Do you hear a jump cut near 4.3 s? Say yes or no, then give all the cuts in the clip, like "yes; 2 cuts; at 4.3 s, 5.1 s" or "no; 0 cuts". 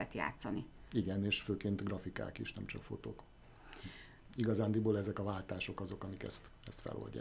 yes; 1 cut; at 4.3 s